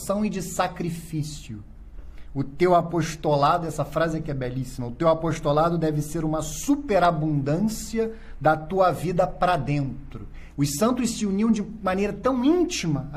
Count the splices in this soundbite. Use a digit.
1